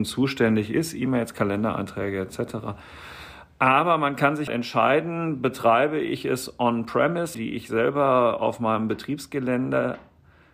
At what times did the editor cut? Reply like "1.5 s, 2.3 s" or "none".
4.5 s, 7.3 s